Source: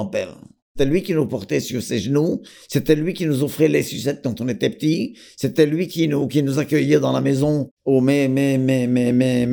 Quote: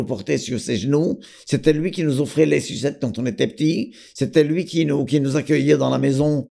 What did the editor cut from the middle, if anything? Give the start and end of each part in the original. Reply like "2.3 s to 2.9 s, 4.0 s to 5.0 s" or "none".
none